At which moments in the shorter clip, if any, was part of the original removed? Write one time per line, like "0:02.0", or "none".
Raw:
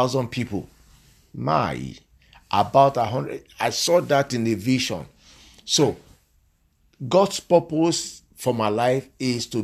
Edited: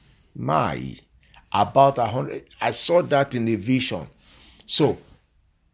none